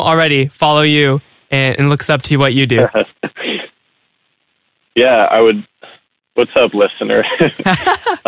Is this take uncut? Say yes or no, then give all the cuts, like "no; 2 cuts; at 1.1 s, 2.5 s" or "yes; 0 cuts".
yes; 0 cuts